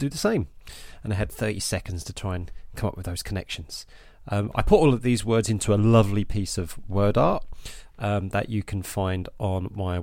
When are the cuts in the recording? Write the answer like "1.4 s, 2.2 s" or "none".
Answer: none